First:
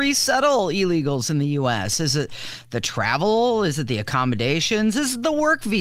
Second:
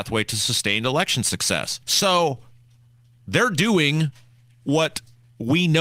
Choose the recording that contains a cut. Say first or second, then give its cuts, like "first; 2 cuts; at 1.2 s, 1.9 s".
second; 1 cut; at 1.8 s